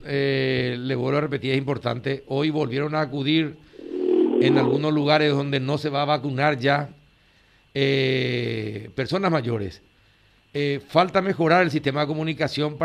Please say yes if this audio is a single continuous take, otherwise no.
yes